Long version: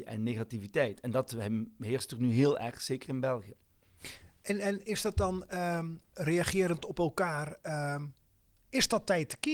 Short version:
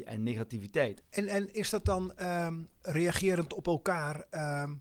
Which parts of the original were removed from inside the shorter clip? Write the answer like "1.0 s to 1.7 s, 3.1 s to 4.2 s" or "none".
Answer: 1.0 s to 4.3 s